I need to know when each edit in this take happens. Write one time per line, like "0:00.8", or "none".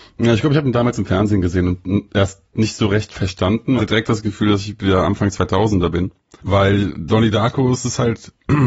0:03.8
0:06.4